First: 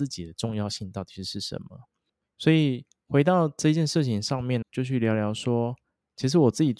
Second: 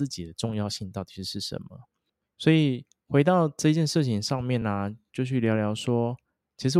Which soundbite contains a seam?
first; 1 cut; at 4.6 s

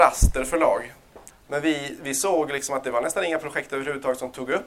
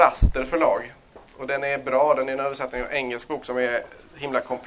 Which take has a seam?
first; 1 cut; at 1.3 s

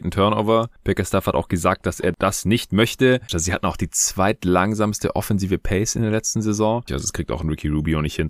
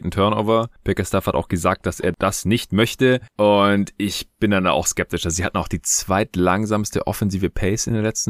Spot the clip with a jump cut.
first; 2 cuts; at 3.3 s, 6.9 s

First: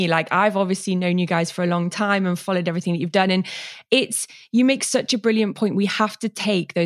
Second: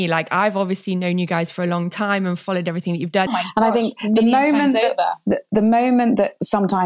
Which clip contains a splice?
second; 1 cut; at 3.3 s

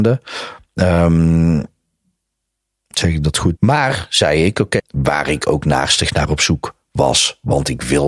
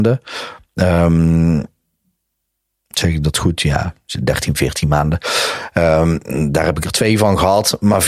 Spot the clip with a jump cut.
first; 2 cuts; at 3.6 s, 4.8 s

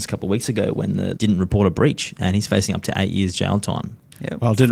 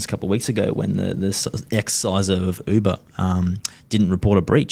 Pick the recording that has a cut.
first; 1 cut; at 1.1 s

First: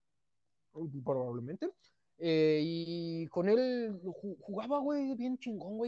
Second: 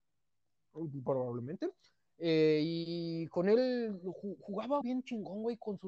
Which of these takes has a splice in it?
second; 1 cut; at 4.8 s

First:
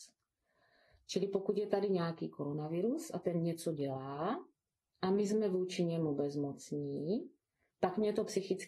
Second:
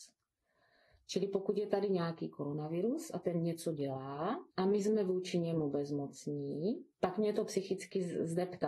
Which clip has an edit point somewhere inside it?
second; 2 cuts; at 4.5 s, 6.9 s

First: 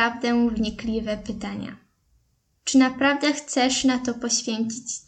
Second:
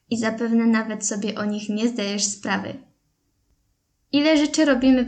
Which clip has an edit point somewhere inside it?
first; 1 cut; at 2.5 s

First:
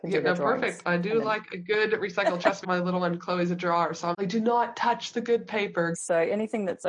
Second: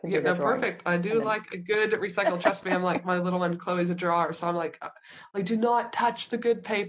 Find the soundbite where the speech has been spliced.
first; 3 cuts; at 2.6 s, 4.1 s, 5.9 s

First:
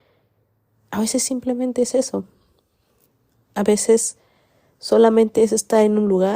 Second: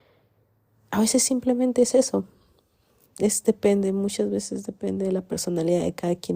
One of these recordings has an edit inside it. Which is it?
second; 1 cut; at 3.1 s

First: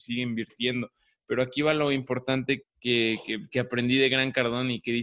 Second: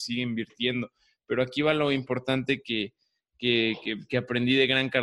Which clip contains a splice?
first; 1 cut; at 2.6 s

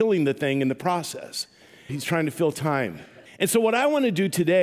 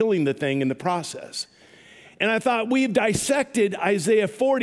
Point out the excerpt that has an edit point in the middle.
first; 2 cuts; at 1.9 s, 3.3 s

